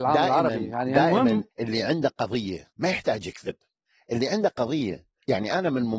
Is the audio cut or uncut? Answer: cut